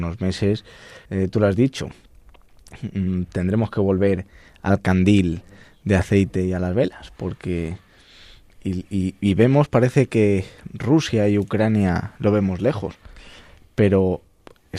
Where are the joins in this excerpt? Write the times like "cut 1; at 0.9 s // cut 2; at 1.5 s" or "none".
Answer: cut 1; at 1.1 s